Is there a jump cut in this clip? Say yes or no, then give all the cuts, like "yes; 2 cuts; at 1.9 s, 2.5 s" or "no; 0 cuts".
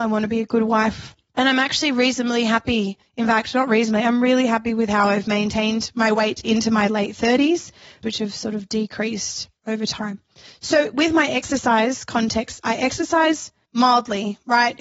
yes; 1 cut; at 8.0 s